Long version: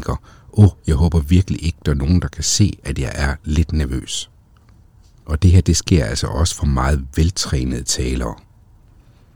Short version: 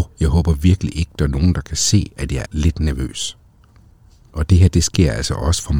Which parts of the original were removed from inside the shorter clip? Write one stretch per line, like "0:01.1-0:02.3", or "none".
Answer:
0:03.1-0:03.4